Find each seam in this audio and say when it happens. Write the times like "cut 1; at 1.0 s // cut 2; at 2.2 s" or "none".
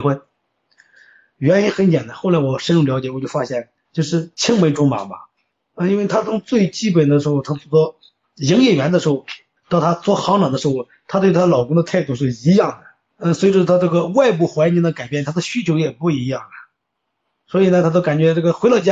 none